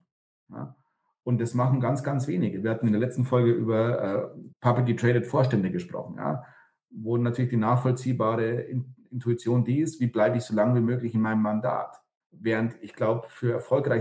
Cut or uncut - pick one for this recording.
cut